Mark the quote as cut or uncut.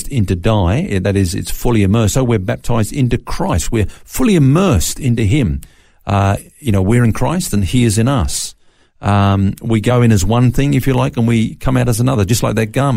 uncut